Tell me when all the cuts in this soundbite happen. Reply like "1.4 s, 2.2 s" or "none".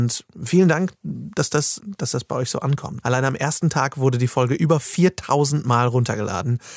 1.8 s, 3.0 s